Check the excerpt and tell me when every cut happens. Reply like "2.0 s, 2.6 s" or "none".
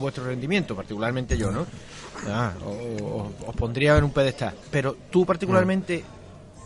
4.6 s